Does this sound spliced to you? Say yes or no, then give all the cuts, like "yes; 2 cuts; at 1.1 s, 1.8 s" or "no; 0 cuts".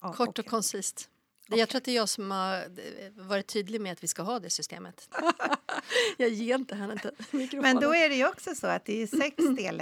yes; 1 cut; at 5.1 s